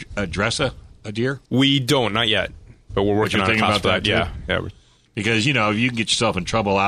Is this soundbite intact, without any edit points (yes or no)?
no